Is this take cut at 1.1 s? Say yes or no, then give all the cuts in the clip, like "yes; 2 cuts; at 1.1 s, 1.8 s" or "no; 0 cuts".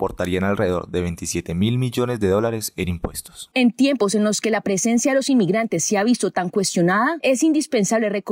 no; 1 cut; at 3.5 s